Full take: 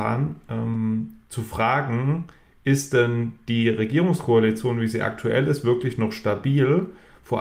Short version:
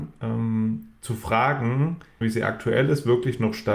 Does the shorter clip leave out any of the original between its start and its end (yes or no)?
yes